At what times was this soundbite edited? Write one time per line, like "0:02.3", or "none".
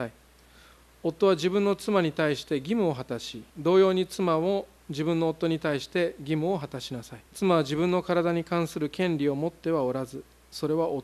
0:03.5
0:07.3

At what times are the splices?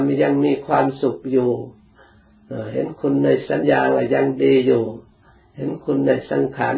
0:03.6

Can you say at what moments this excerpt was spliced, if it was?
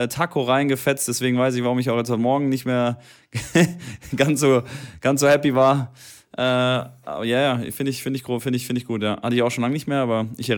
none

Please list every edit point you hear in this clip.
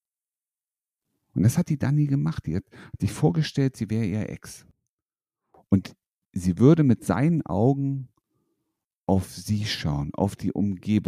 none

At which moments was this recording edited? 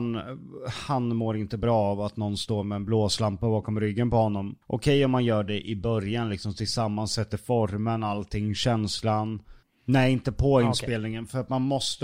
0:04.6
0:09.6

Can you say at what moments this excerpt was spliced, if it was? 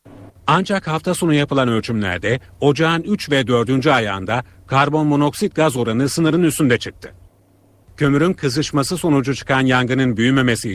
none

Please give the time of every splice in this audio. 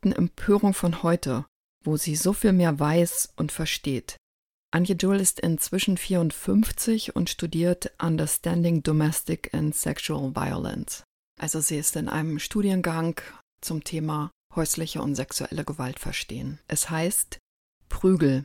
0:16.6

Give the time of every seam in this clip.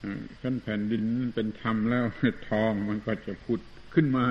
none

